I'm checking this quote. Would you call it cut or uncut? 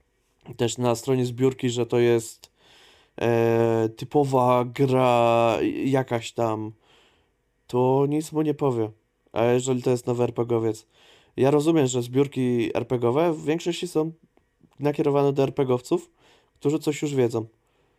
uncut